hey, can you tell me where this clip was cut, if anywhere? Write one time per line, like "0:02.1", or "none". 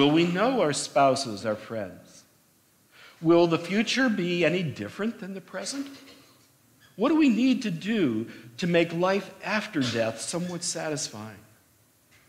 0:01.4